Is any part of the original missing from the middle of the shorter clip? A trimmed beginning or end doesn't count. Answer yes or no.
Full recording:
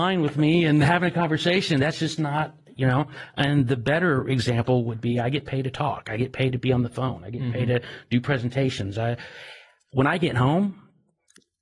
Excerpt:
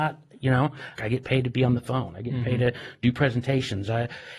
yes